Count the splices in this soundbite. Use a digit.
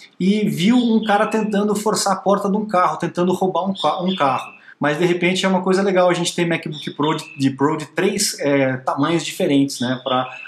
1